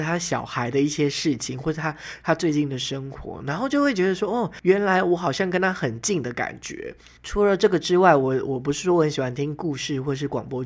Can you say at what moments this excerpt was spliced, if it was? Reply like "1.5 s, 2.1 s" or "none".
none